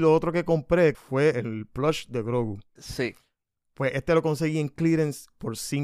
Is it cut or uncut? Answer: cut